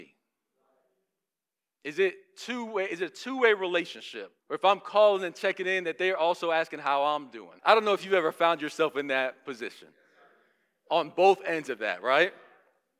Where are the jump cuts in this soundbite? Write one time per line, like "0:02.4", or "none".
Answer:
0:04.4
0:07.6